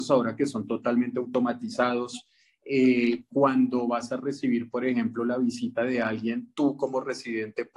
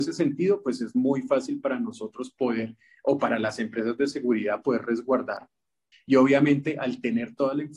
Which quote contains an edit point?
second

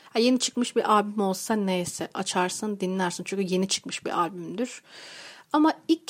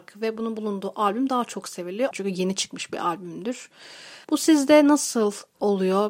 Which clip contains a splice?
second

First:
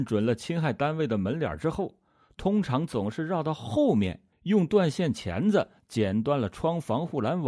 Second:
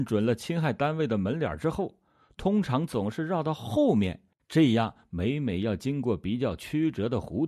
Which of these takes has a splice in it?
second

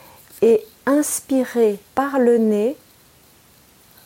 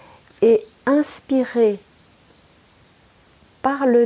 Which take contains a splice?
first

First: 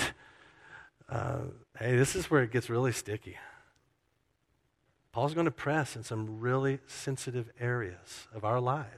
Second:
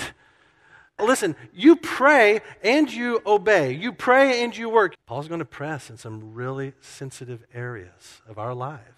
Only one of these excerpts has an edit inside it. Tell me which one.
second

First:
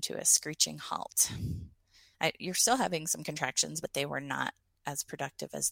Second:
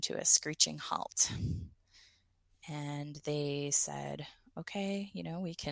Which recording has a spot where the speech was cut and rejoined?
first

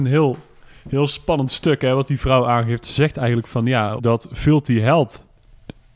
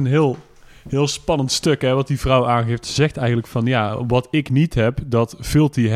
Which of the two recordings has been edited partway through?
first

